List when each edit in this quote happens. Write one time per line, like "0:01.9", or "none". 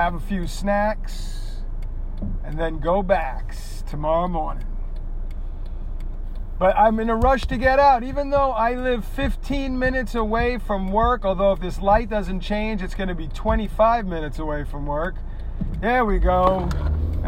none

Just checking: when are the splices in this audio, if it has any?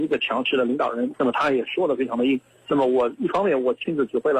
0:01.1

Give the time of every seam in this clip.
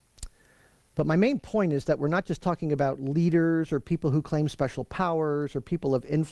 none

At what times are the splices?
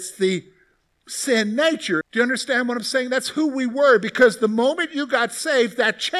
0:02.0

